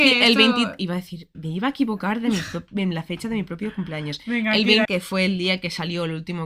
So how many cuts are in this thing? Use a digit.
2